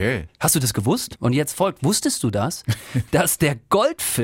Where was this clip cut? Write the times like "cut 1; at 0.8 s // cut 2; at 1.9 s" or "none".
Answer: cut 1; at 1.2 s